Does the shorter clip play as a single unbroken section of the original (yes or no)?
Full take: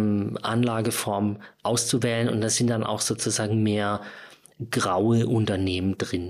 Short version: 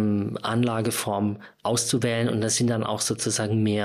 yes